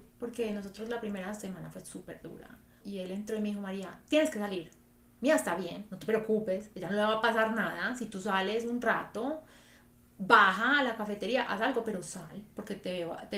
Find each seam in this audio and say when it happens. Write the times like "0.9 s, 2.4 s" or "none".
2.8 s